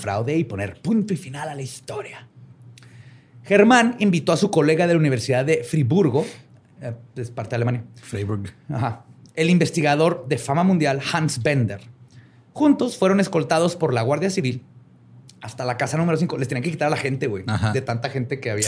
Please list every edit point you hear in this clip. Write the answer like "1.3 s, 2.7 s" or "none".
none